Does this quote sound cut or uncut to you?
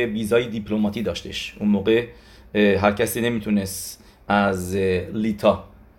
uncut